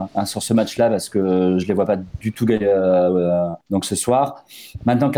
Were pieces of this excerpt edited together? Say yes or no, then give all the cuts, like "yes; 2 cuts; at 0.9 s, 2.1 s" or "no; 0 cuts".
yes; 1 cut; at 3.6 s